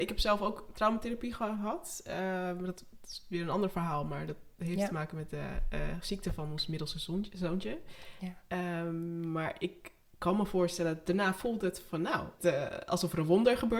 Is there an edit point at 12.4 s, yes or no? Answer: yes